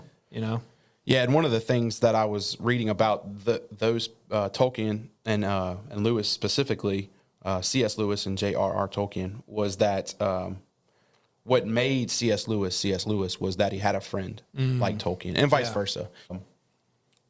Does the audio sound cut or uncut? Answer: cut